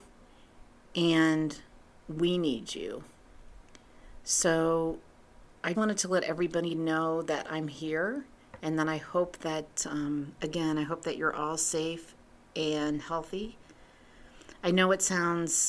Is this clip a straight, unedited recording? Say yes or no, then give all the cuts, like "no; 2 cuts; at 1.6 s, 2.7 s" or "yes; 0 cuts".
no; 1 cut; at 5.7 s